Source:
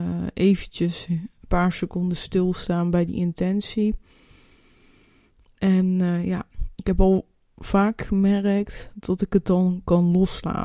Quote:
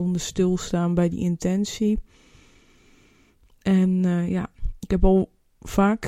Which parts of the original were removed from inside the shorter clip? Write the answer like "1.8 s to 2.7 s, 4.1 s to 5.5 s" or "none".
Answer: none